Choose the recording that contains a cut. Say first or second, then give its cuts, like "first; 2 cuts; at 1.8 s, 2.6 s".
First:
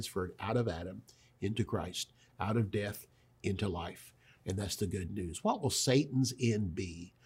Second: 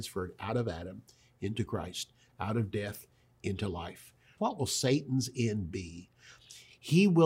second; 1 cut; at 4.4 s